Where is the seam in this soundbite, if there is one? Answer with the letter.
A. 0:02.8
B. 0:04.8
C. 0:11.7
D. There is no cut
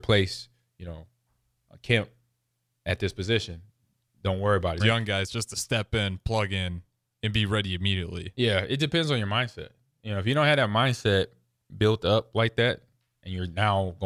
B